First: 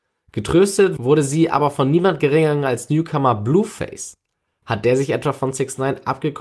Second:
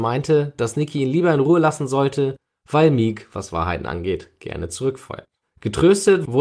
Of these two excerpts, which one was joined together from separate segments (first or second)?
second